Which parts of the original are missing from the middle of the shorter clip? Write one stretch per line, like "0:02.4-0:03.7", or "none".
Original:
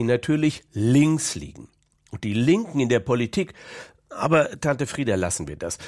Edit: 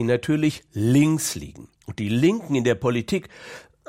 0:01.8-0:02.0